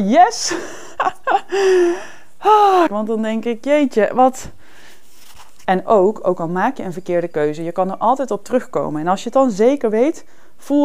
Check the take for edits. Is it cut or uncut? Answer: cut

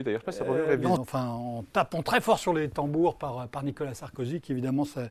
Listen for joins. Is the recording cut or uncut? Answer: cut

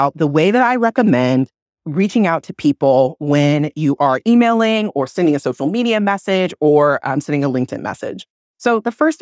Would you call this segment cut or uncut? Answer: uncut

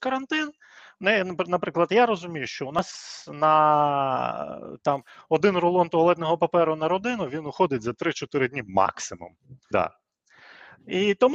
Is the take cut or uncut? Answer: cut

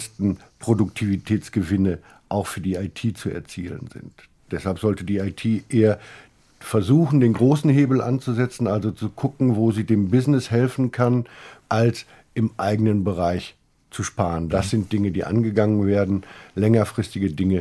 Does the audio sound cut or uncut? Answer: cut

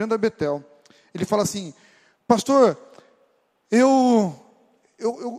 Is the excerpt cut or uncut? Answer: uncut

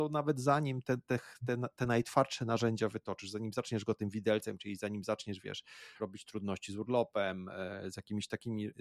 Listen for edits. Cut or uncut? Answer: cut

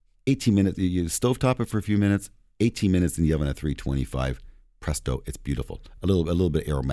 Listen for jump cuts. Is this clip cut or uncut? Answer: uncut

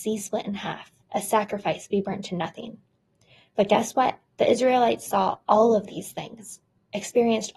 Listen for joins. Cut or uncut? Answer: cut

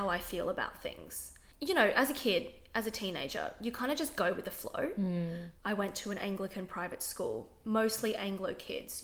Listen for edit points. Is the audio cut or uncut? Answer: cut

